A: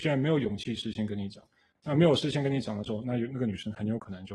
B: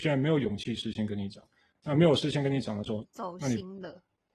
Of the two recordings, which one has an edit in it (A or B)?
B